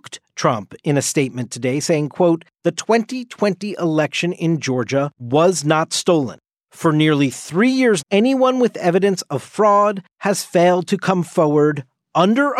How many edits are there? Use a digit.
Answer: 1